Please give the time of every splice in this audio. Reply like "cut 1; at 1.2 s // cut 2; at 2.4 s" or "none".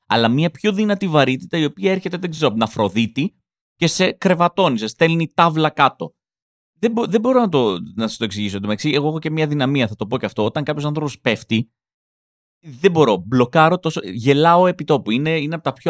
none